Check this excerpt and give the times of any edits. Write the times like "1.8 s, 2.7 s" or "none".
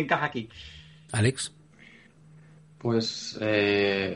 1.1 s

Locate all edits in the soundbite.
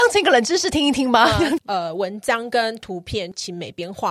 1.6 s

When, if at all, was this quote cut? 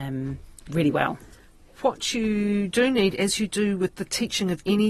none

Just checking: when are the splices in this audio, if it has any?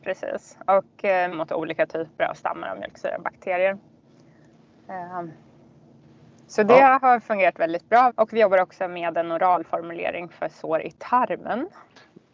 1.3 s, 8.1 s

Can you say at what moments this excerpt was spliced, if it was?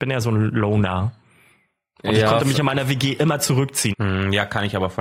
3.9 s

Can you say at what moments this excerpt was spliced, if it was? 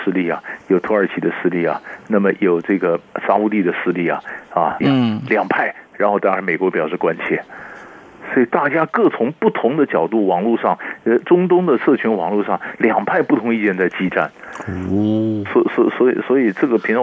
4.8 s

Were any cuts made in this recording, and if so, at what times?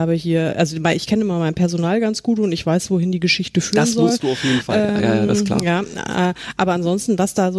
none

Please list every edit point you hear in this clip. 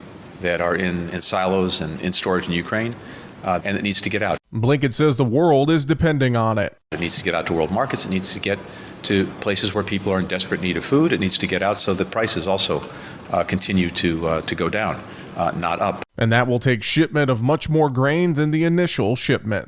1.1 s, 3.6 s

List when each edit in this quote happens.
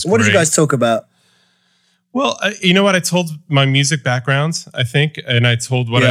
none

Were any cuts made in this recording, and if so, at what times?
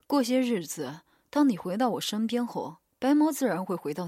none

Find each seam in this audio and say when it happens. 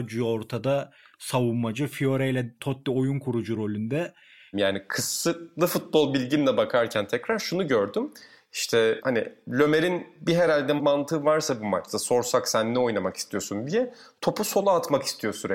4.5 s

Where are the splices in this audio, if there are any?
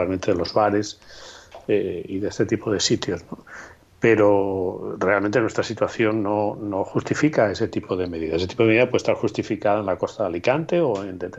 none

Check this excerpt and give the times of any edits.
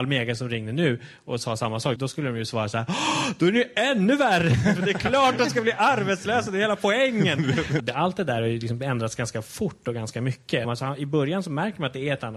2.0 s, 7.8 s, 10.6 s

